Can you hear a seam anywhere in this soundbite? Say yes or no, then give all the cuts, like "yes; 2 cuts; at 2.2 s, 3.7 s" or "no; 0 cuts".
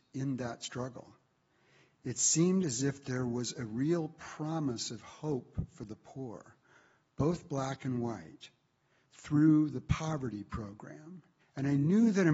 yes; 1 cut; at 11.4 s